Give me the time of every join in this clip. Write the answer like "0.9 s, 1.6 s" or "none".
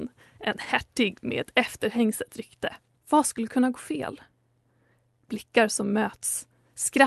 2.9 s